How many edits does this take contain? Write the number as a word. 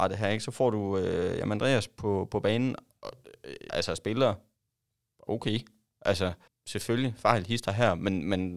two